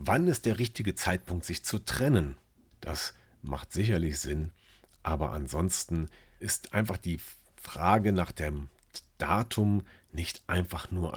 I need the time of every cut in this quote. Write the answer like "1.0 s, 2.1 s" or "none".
2.7 s, 6.4 s